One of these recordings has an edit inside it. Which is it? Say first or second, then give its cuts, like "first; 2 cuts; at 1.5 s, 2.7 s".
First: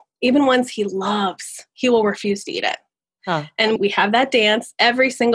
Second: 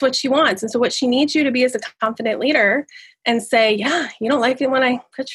first; 1 cut; at 3.8 s